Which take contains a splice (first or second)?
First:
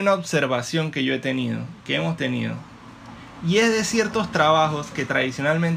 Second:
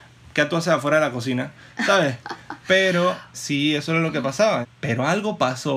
second